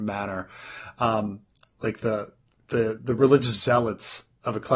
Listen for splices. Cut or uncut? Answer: uncut